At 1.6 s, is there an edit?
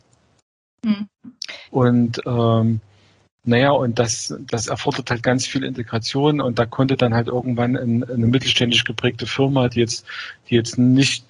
yes; 1 cut; at 1.6 s

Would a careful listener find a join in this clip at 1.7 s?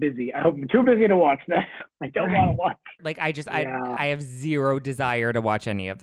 no; 1 cut; at 3.0 s

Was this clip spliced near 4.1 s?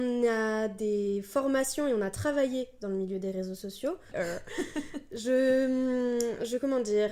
yes; 1 cut; at 4.1 s

